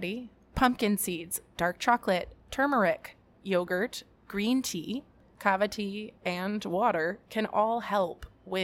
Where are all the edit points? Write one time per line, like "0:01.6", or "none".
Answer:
0:03.3
0:06.2